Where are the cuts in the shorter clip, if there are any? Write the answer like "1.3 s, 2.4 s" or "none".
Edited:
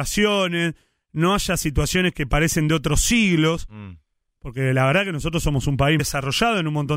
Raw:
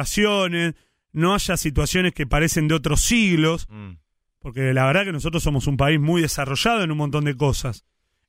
6.0 s

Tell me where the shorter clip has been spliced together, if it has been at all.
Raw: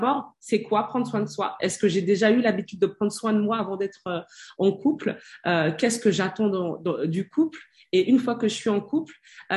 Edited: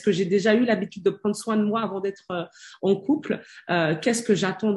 none

